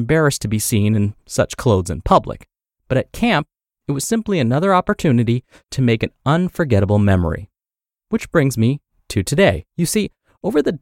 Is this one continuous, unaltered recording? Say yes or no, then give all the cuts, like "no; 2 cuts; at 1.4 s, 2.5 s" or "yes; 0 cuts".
no; 1 cut; at 9.7 s